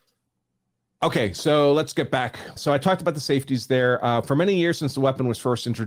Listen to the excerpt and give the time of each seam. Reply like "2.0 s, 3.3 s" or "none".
2.6 s